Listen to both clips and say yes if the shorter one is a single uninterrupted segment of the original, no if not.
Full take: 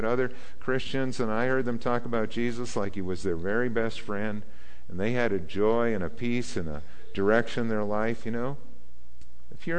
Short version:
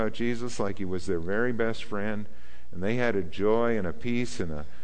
yes